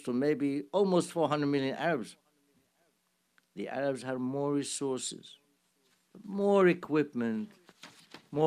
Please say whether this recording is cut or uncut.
uncut